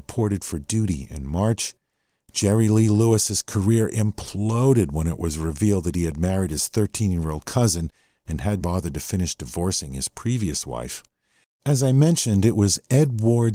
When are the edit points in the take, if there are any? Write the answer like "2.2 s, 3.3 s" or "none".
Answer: 8.6 s, 11.4 s